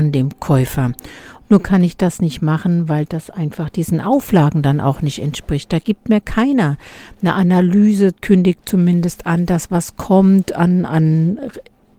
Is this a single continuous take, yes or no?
no